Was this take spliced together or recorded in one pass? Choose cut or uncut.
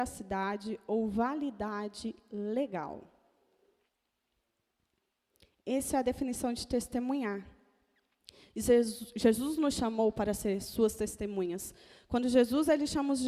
uncut